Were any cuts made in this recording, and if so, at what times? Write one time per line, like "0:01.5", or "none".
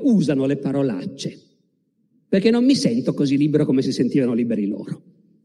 0:02.1